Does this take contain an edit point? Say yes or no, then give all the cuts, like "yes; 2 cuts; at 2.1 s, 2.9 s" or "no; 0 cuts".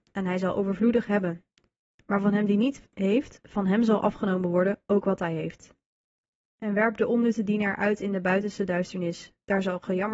no; 0 cuts